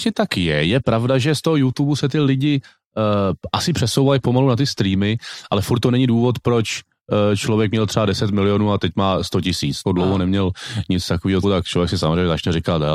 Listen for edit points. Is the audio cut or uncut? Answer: cut